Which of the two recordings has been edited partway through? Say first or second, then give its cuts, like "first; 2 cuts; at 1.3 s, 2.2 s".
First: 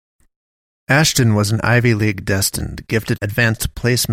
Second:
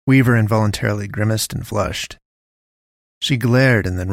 first; 1 cut; at 3.2 s